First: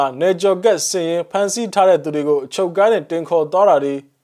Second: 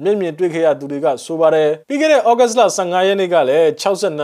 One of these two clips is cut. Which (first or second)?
second